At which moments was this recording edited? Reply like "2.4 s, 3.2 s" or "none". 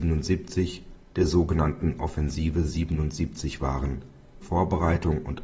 4.4 s